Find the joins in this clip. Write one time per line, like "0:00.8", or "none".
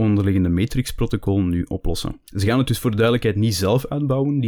0:02.3